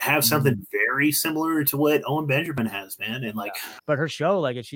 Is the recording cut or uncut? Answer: cut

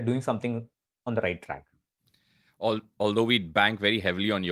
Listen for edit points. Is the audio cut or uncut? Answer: uncut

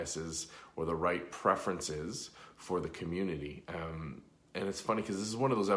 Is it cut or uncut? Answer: uncut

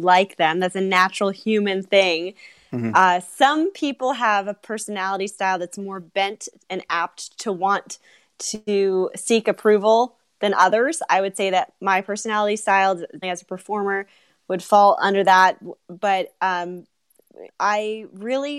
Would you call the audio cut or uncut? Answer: cut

